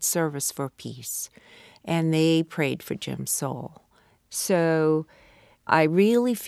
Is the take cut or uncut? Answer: uncut